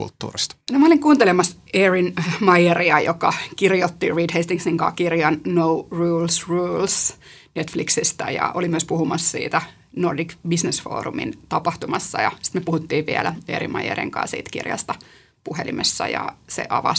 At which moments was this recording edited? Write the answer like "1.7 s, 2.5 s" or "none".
none